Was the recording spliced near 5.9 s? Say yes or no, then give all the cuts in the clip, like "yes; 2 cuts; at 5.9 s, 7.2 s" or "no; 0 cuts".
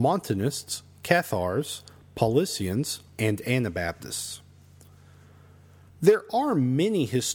yes; 2 cuts; at 3.1 s, 5.9 s